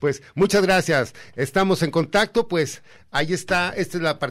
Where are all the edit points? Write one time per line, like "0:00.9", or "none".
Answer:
none